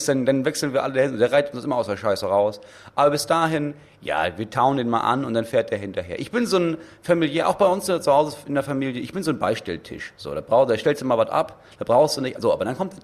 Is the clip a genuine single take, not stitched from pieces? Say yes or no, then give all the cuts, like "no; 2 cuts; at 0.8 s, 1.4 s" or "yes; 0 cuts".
yes; 0 cuts